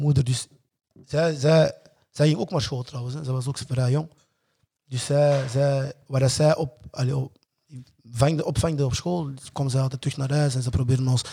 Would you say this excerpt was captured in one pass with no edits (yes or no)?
yes